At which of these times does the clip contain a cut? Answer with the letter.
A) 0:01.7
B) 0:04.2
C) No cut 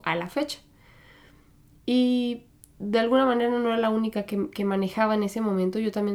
C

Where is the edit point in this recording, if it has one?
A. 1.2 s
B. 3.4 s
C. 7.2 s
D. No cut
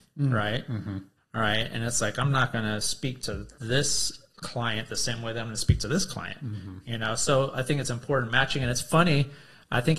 A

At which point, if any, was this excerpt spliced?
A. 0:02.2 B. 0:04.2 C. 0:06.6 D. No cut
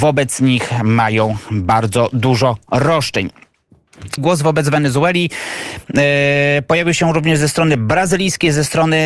B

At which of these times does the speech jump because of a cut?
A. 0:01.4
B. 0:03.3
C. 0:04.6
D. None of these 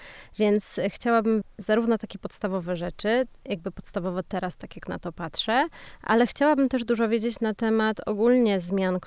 A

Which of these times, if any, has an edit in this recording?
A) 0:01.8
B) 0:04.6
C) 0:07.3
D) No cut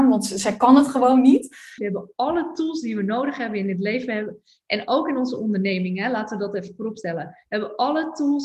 A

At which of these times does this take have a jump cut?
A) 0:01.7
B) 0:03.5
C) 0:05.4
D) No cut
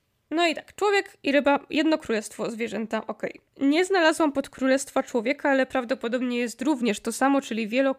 B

